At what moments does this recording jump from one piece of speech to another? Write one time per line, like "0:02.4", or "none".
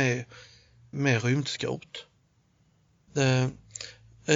0:00.9
0:03.1